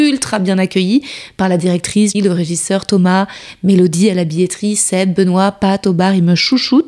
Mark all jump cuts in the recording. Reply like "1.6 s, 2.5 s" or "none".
2.1 s